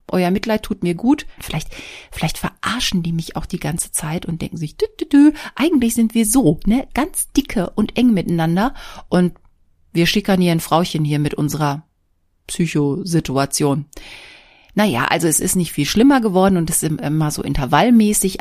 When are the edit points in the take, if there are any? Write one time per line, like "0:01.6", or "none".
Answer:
0:01.4